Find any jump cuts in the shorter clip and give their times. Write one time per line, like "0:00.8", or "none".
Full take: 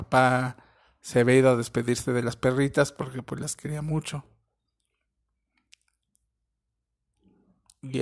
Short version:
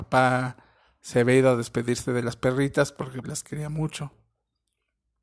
0:03.2